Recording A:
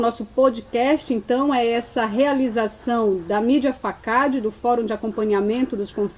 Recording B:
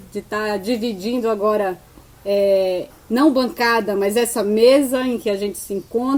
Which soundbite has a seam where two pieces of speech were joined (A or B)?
B